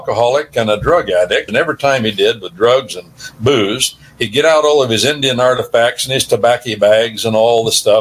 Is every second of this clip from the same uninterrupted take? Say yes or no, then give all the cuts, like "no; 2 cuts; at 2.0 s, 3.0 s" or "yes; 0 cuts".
no; 1 cut; at 1.5 s